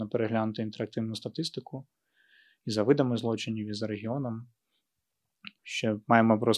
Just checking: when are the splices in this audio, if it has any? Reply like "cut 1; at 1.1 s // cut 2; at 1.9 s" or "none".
cut 1; at 5.6 s